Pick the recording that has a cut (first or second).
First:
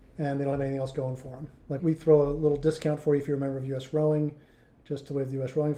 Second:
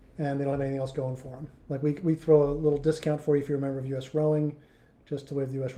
first